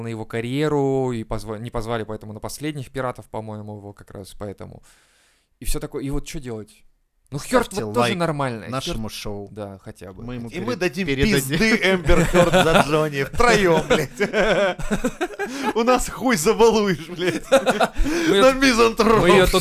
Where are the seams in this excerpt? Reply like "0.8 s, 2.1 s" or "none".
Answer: 7.2 s